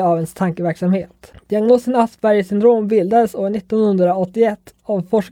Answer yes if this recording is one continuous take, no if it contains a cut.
no